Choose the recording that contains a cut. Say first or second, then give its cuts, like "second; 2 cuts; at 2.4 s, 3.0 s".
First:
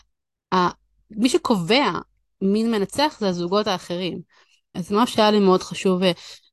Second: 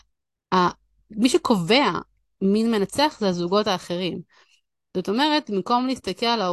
first; 1 cut; at 4.7 s